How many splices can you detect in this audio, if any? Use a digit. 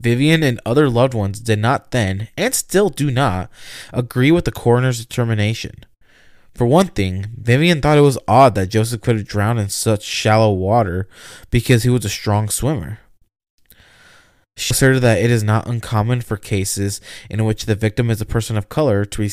1